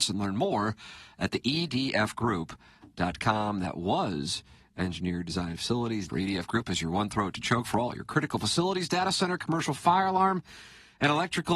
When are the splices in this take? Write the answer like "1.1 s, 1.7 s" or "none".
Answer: 6.1 s